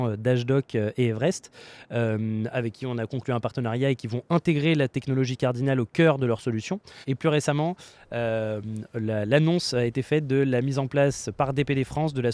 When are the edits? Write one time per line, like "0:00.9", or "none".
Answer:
none